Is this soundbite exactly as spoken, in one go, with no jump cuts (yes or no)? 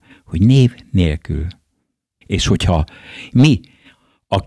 no